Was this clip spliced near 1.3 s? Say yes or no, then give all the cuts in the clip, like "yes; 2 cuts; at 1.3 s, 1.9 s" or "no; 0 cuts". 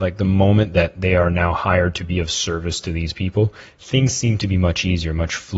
no; 0 cuts